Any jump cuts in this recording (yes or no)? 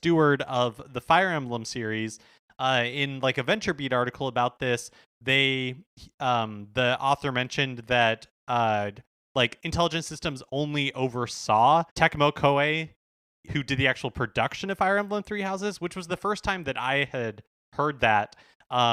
yes